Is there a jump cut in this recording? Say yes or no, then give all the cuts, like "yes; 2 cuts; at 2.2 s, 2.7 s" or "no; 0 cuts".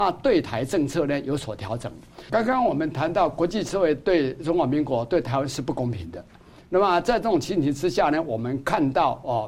yes; 1 cut; at 2.3 s